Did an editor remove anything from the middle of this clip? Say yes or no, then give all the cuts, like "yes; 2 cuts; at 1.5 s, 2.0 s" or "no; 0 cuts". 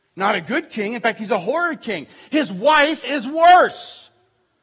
yes; 1 cut; at 3.0 s